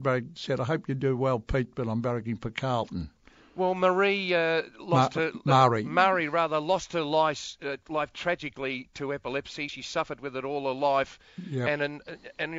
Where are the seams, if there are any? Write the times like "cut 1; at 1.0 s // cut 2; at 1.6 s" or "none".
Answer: none